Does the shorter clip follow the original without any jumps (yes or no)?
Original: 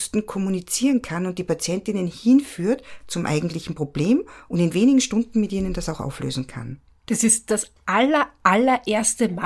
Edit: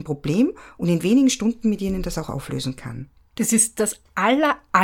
yes